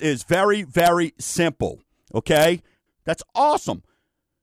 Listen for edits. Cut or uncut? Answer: cut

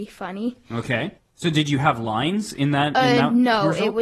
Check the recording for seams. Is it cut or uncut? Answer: cut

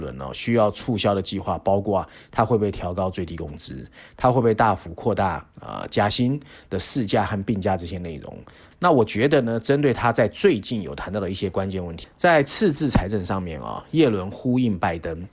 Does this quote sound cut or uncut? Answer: cut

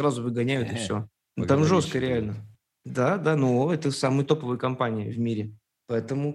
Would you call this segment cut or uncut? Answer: uncut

